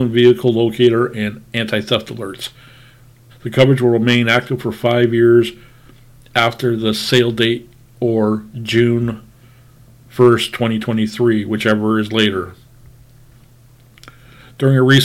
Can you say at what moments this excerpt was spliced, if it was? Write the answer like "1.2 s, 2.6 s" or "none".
3.3 s